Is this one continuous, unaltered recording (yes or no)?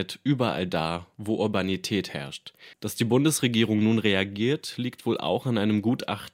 no